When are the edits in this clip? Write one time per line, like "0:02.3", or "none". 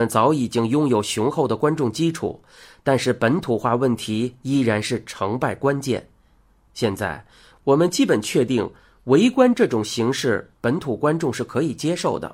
none